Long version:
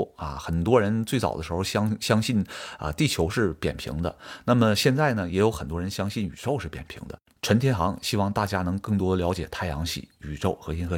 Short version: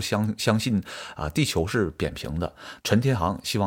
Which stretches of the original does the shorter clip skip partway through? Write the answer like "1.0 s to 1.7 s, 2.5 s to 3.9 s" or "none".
4.4 s to 7.4 s